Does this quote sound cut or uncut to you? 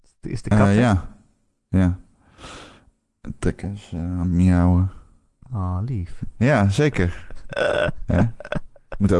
cut